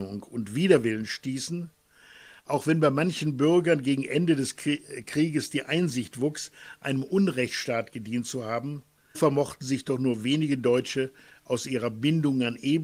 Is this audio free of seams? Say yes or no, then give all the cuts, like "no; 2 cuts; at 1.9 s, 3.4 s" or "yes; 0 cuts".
no; 1 cut; at 9.1 s